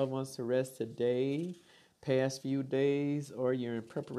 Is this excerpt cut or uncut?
uncut